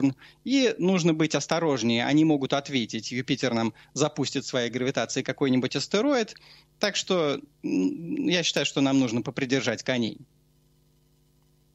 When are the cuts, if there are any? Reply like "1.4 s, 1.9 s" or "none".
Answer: none